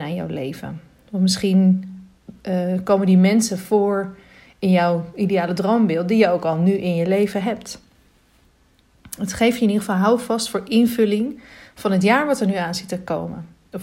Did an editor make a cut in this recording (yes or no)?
no